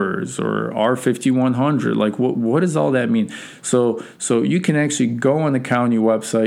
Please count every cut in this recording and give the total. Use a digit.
0